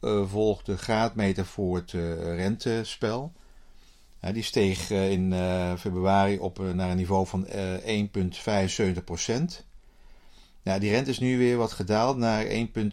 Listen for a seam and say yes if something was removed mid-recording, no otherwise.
no